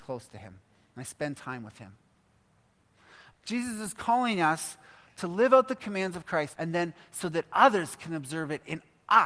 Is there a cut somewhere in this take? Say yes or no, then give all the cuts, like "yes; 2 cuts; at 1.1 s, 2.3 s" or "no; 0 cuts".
yes; 2 cuts; at 3.3 s, 6.5 s